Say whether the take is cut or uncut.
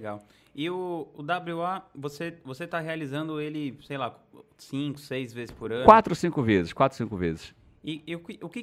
uncut